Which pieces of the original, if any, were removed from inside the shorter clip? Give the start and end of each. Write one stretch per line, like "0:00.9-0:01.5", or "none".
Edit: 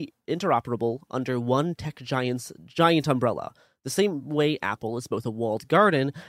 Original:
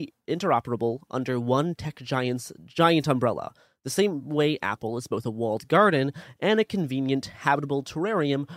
none